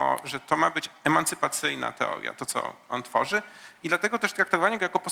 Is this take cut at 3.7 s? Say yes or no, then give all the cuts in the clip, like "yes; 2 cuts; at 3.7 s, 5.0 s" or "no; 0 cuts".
no; 0 cuts